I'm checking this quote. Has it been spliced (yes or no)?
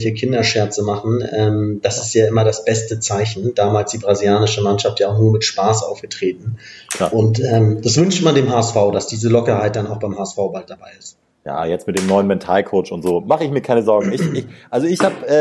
no